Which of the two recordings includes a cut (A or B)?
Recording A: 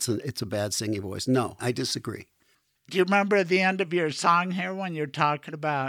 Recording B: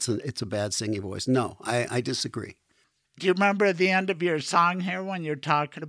A